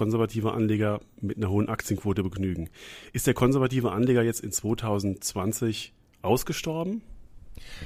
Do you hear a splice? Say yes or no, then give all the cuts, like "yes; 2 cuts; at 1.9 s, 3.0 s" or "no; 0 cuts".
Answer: no; 0 cuts